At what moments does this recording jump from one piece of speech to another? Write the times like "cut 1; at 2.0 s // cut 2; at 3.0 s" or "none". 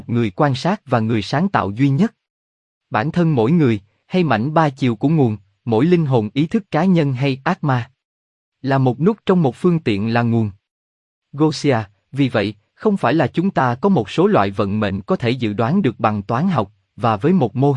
none